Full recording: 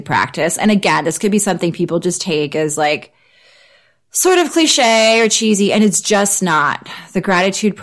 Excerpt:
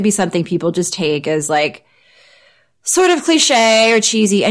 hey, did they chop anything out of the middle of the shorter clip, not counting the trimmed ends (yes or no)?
no